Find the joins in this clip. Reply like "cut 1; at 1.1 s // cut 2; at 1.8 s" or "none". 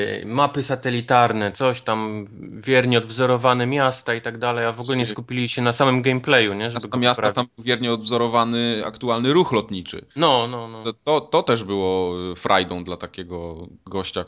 cut 1; at 10.1 s